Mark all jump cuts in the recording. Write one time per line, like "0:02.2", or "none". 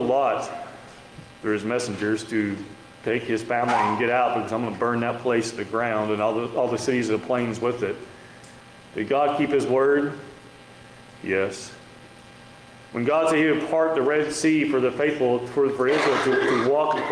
none